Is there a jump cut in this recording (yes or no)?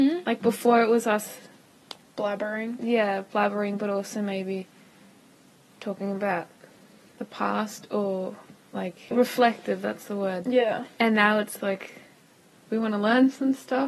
yes